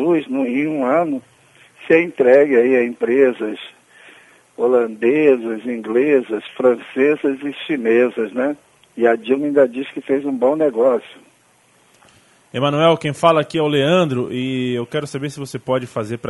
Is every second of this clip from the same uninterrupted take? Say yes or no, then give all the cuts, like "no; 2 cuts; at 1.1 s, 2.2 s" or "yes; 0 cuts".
yes; 0 cuts